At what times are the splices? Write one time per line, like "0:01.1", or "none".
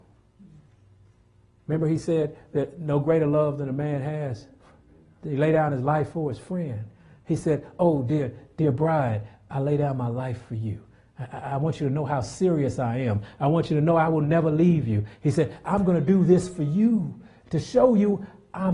none